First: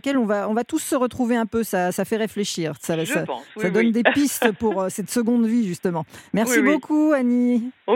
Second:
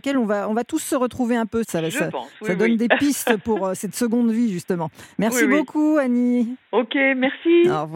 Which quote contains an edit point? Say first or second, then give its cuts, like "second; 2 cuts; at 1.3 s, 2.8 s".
second; 1 cut; at 1.6 s